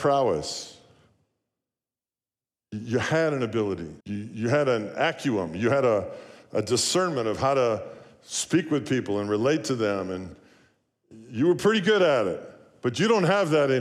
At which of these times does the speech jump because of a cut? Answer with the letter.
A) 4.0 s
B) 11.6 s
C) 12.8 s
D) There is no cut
A